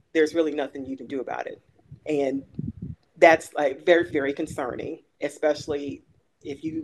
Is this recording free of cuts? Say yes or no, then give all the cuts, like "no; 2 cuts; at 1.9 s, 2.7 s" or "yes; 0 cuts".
no; 2 cuts; at 2.0 s, 4.1 s